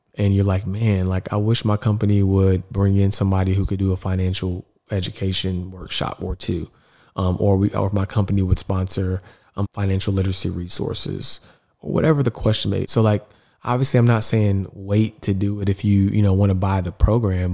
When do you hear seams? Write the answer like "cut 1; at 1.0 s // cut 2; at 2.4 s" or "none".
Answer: cut 1; at 9.6 s // cut 2; at 12.8 s